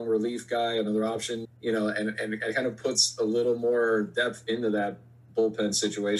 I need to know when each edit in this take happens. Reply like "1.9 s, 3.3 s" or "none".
1.4 s